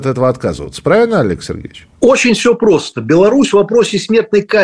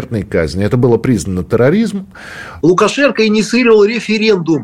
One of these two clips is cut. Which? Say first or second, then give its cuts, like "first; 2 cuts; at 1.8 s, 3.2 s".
second; 1 cut; at 2.6 s